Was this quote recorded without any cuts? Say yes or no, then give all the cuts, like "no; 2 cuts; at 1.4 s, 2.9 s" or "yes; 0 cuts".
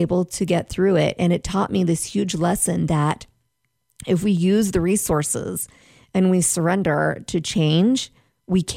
yes; 0 cuts